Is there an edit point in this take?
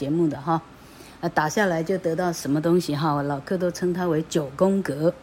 no; 0 cuts

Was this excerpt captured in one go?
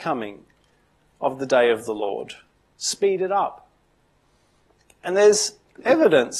yes; 0 cuts

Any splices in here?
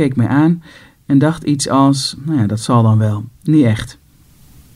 yes; 1 cut; at 3.3 s

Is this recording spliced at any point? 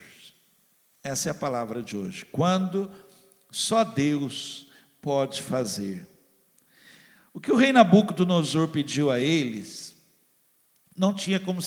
no; 0 cuts

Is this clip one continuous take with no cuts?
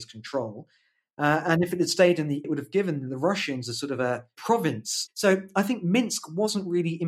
no; 1 cut; at 2.4 s

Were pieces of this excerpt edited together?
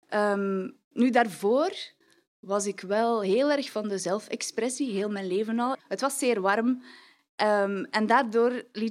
yes; 1 cut; at 5.8 s

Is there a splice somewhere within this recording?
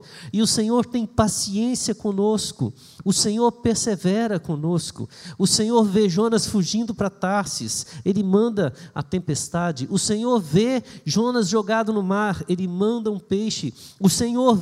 no; 0 cuts

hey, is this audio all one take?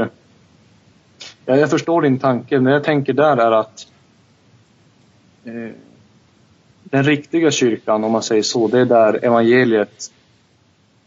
yes; 0 cuts

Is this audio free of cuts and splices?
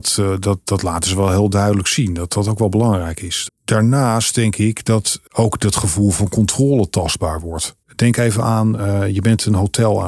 no; 2 cuts; at 3.5 s, 7.8 s

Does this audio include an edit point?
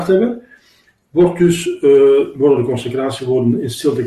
no; 0 cuts

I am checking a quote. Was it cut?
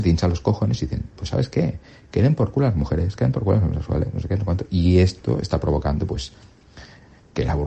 no; 0 cuts

